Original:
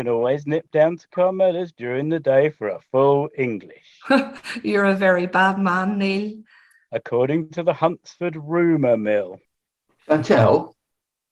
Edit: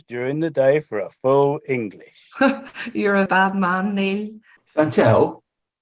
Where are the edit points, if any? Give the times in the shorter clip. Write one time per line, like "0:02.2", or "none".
0:03.3
0:04.6

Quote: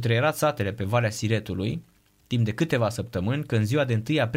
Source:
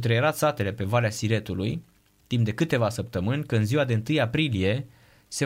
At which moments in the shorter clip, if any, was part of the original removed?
none

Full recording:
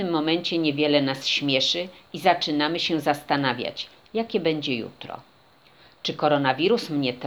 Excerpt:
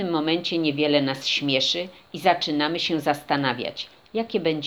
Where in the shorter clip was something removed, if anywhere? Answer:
none

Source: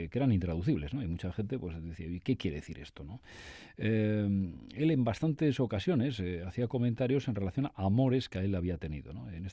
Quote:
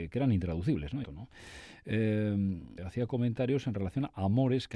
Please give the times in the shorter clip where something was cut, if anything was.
0:01.0
0:02.8

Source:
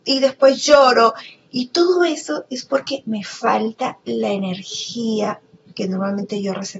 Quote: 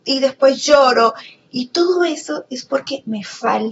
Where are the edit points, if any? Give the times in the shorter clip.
none

